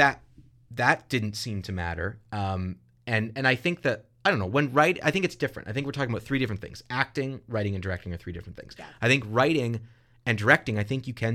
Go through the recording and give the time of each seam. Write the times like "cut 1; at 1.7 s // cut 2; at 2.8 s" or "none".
none